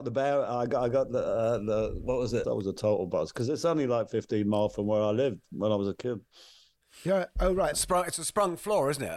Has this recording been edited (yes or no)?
yes